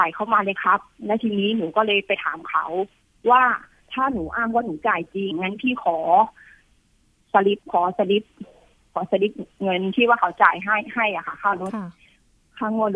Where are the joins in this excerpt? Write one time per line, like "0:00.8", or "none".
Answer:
0:05.3
0:07.6